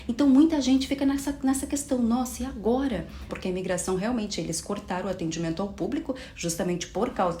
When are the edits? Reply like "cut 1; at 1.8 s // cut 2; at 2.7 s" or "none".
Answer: cut 1; at 3.3 s